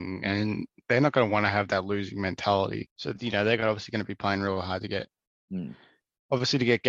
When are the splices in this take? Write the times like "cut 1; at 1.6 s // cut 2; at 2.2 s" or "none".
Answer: cut 1; at 2.9 s